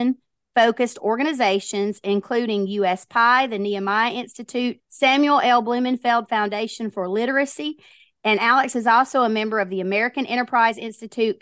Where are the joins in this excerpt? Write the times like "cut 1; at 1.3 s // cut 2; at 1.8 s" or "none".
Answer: cut 1; at 4.8 s